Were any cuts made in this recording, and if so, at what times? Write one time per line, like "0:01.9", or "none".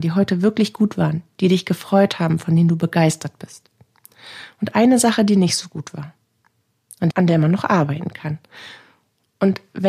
0:07.1